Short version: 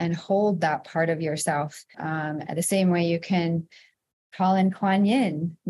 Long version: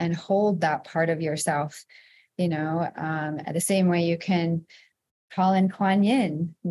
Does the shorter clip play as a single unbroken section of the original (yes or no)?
no